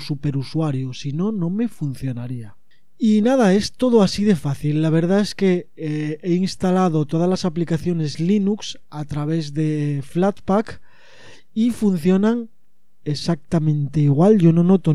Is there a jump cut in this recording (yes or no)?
no